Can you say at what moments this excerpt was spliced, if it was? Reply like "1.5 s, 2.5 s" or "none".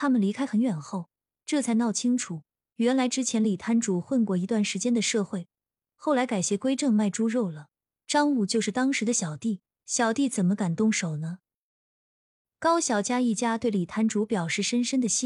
1.3 s, 9.7 s

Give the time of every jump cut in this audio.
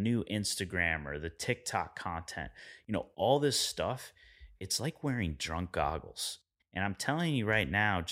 6.6 s

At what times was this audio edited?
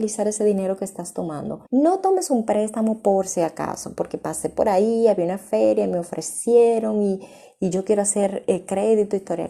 1.7 s

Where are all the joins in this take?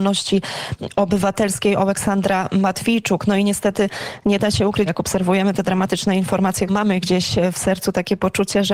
4.9 s, 6.7 s

